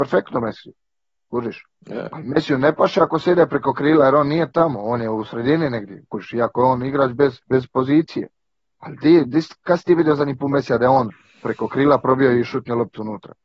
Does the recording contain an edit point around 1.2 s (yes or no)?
no